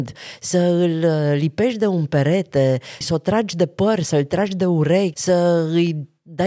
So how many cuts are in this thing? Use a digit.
2